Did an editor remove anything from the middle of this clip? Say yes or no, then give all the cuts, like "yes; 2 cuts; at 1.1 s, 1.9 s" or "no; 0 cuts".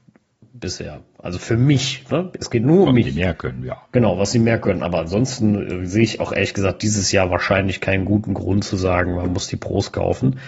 no; 0 cuts